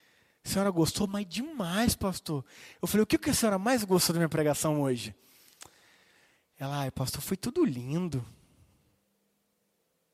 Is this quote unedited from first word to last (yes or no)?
yes